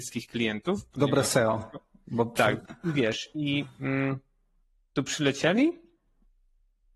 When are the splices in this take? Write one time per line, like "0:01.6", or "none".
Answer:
0:02.6